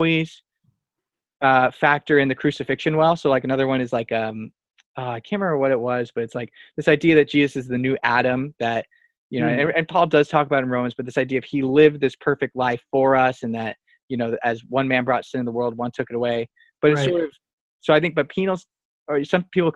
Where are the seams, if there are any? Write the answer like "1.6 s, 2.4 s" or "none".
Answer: none